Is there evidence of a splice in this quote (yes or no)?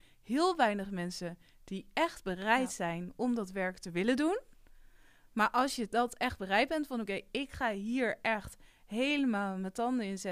no